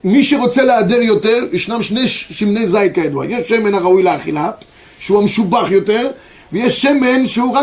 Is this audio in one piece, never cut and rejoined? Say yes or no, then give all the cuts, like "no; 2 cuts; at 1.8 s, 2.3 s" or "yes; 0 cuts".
yes; 0 cuts